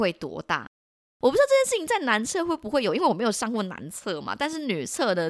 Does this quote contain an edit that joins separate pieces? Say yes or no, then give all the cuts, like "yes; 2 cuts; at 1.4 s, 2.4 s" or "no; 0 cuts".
yes; 1 cut; at 1.0 s